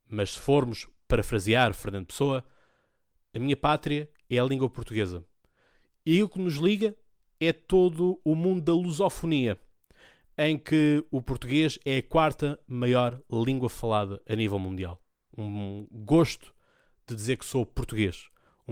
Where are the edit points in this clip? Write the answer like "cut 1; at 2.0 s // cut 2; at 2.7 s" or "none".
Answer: cut 1; at 15.3 s